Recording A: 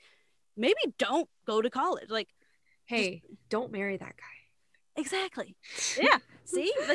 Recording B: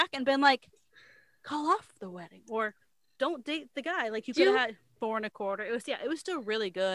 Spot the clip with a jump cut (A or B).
B